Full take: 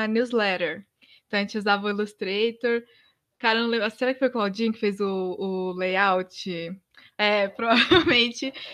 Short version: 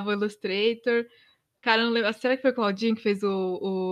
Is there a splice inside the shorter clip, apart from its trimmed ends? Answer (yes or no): no